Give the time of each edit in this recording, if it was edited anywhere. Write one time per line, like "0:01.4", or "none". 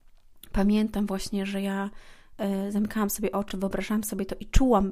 none